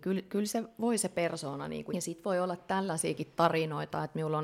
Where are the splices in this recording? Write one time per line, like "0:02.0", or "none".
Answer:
0:01.9